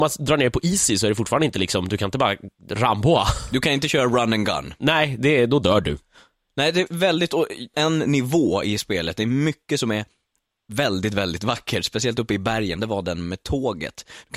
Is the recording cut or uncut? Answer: cut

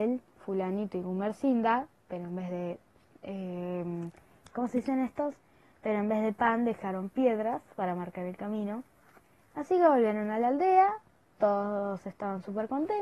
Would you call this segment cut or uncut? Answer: uncut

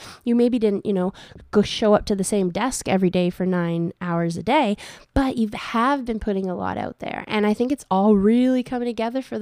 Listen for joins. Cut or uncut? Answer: uncut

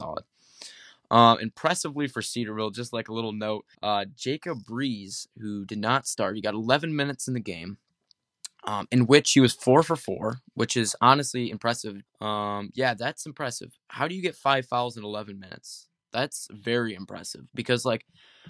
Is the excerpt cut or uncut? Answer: cut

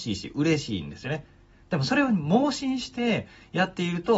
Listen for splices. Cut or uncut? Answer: uncut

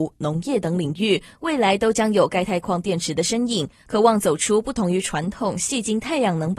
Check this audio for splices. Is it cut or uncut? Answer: uncut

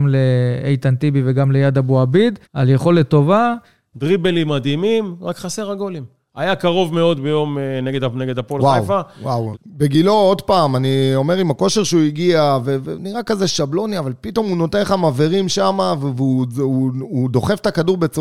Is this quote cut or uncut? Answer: cut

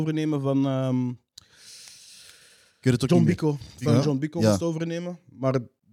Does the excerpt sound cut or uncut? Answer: uncut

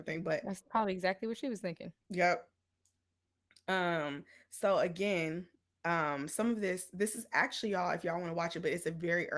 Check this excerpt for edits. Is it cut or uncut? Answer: uncut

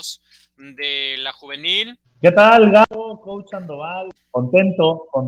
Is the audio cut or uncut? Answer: cut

